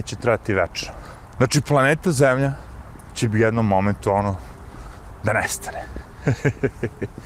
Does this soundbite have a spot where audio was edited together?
no; 0 cuts

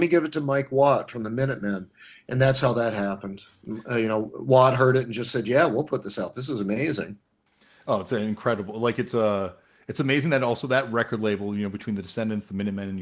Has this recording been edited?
no; 0 cuts

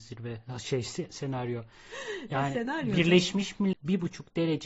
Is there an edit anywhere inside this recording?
yes; 1 cut; at 3.7 s

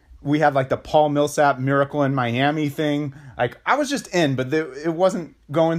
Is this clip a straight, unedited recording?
yes; 0 cuts

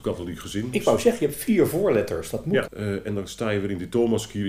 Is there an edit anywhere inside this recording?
yes; 1 cut; at 2.6 s

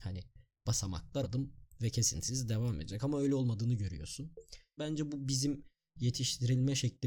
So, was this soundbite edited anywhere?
yes; 2 cuts; at 1.2 s, 4.8 s

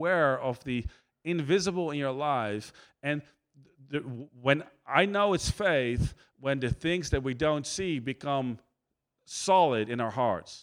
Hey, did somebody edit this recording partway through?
no; 0 cuts

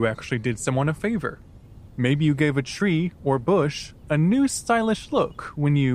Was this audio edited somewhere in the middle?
no; 0 cuts

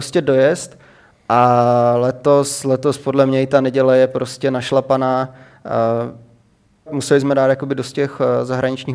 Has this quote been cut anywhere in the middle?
yes; 1 cut; at 6.9 s

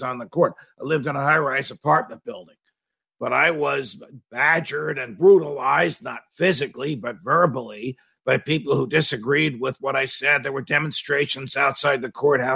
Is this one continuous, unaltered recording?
yes; 0 cuts

